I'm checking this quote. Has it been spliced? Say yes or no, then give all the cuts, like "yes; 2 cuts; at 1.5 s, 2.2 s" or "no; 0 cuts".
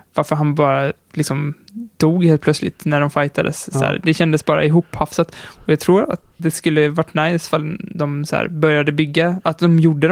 yes; 1 cut; at 6.4 s